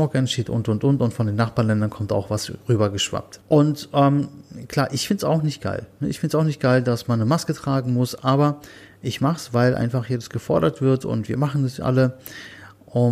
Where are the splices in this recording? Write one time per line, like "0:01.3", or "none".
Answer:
0:03.4